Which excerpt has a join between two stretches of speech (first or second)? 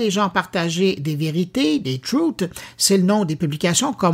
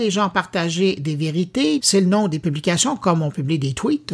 second